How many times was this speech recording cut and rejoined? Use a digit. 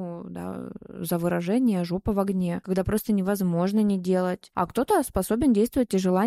0